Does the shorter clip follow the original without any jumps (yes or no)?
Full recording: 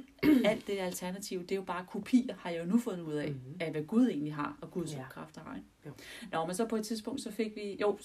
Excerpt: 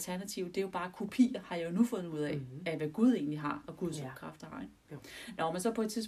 yes